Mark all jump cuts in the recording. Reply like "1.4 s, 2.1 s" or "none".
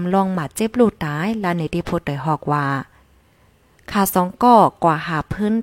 none